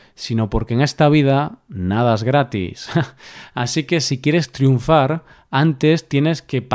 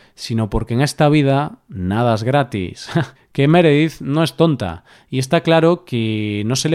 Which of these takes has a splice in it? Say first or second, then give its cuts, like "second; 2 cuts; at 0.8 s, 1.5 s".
second; 1 cut; at 3.1 s